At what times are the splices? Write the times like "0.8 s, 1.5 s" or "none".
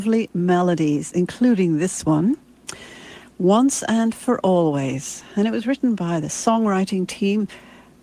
none